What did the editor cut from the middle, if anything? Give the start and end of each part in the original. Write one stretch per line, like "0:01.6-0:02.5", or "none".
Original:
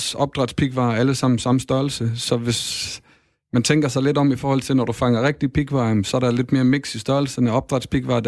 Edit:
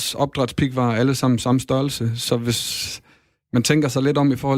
none